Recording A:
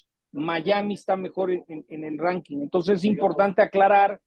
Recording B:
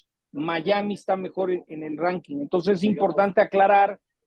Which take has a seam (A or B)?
B